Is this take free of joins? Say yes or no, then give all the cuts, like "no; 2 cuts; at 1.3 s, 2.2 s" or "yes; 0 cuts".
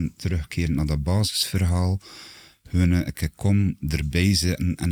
yes; 0 cuts